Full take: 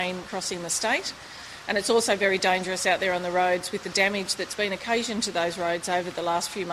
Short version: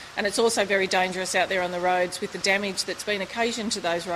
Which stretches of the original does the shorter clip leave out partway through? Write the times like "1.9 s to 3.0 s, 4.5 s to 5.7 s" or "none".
none

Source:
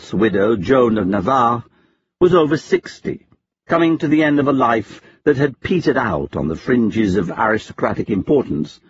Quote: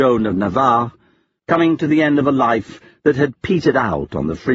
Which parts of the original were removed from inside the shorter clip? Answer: 2.1 s to 3.6 s

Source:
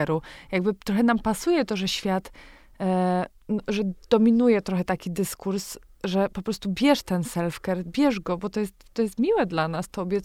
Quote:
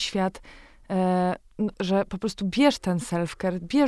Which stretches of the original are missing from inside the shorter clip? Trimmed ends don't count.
3.6 s to 6.0 s

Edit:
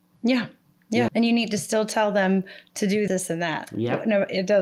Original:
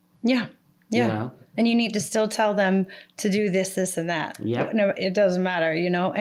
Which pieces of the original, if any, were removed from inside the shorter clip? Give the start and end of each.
1.1 s to 1.5 s, 3.5 s to 3.7 s

